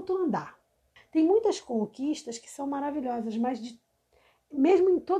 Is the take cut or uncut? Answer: cut